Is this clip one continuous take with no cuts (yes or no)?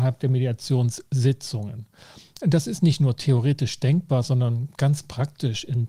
yes